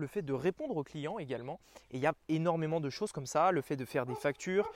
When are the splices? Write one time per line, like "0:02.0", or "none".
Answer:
none